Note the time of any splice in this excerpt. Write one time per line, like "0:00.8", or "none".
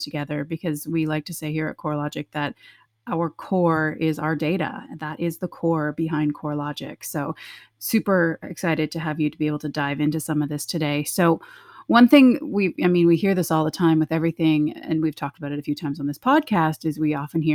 none